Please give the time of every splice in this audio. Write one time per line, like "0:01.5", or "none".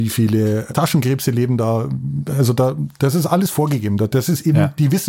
none